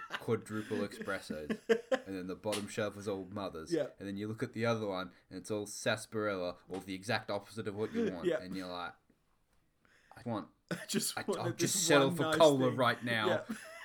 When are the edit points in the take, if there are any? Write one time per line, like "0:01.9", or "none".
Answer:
0:10.2